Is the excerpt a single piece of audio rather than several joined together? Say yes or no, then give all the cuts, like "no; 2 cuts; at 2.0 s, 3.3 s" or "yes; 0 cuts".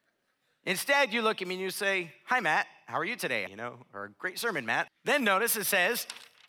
no; 2 cuts; at 3.5 s, 4.9 s